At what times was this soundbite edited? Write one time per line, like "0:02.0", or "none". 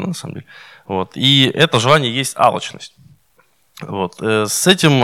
none